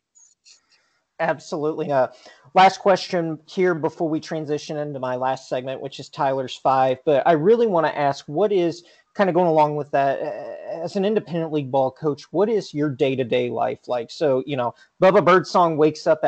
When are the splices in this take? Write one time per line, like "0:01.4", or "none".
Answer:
0:01.9